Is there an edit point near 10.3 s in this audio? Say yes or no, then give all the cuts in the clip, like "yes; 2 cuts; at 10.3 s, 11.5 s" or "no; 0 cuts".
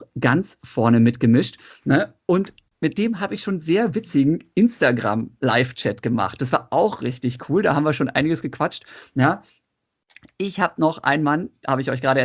no; 0 cuts